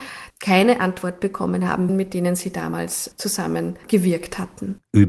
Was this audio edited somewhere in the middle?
yes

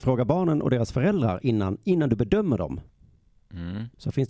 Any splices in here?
no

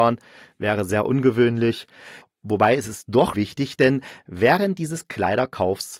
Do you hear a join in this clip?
yes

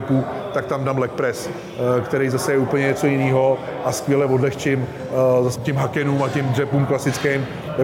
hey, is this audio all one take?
no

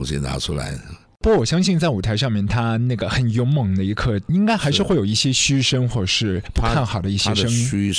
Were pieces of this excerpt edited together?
no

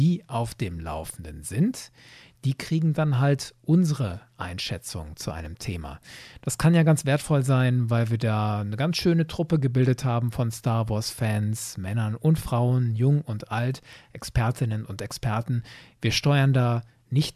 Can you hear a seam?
no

